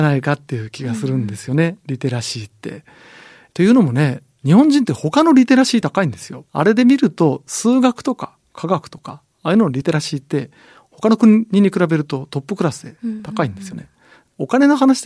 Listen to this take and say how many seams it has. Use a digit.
1